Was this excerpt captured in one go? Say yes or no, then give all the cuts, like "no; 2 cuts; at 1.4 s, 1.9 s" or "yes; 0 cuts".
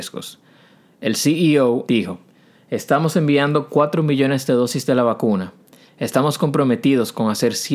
no; 1 cut; at 1.9 s